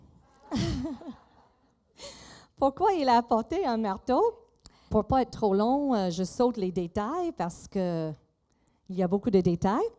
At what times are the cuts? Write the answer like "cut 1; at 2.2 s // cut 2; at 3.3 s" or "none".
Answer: cut 1; at 4.9 s